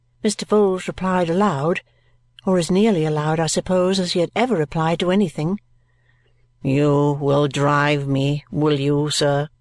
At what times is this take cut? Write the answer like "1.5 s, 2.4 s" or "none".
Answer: none